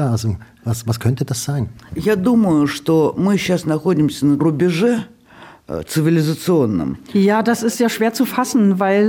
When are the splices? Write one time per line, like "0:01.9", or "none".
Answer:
0:04.4